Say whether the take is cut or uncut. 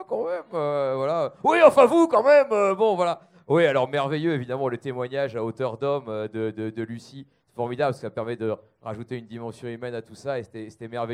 uncut